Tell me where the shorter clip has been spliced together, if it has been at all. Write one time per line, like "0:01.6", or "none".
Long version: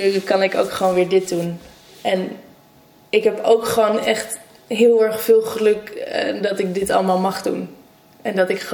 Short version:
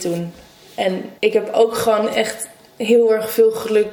0:01.2